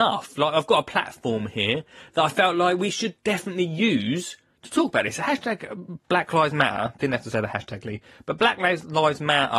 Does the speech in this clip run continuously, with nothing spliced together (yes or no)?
yes